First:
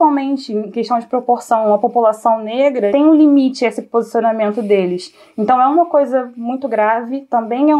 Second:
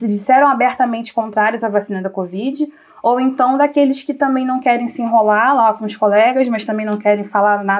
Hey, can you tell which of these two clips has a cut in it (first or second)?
first